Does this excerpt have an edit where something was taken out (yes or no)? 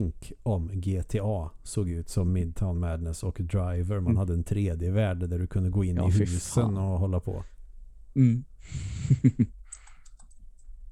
no